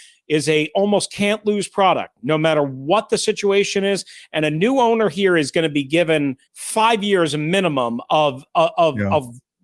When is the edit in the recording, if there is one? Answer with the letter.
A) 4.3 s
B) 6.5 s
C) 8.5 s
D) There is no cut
B